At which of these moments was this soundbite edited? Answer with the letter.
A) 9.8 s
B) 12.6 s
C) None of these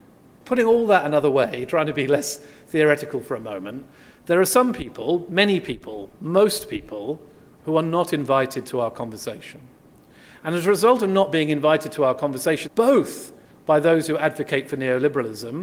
B